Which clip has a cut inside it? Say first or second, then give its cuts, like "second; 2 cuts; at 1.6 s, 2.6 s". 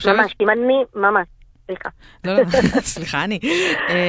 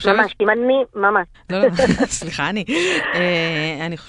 second; 1 cut; at 1.3 s